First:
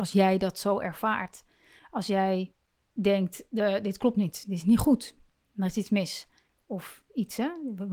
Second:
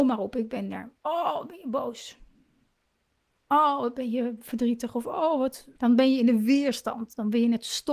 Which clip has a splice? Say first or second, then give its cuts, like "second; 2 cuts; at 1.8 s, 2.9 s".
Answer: second; 1 cut; at 5.8 s